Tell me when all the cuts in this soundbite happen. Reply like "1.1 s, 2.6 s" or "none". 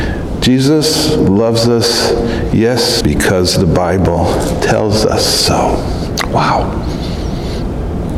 3.0 s